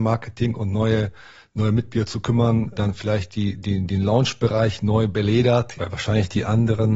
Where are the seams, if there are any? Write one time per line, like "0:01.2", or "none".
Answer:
0:02.7
0:05.7